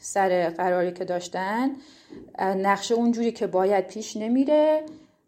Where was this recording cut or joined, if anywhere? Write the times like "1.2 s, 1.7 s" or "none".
none